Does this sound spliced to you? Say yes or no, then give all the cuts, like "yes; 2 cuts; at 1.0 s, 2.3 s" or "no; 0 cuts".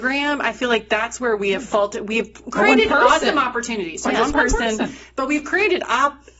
no; 0 cuts